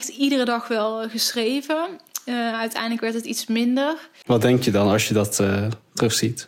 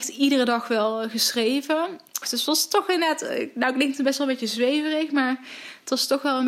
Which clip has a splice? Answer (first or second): second